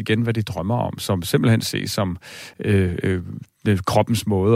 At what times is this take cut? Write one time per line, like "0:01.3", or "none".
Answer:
none